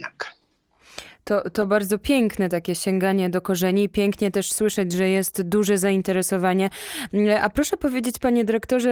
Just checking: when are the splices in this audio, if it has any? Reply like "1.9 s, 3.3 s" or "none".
none